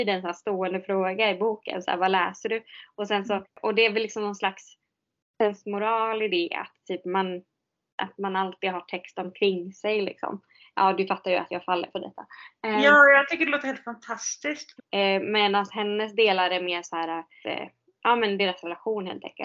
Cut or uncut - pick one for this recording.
cut